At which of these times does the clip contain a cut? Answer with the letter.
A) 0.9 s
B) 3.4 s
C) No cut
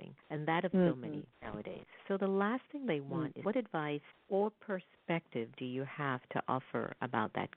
B